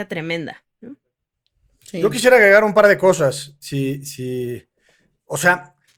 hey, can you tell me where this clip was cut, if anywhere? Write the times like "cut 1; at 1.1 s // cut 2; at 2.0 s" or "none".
none